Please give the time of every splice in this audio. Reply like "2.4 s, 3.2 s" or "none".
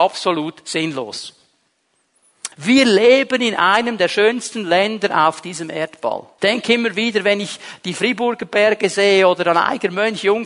2.5 s, 6.4 s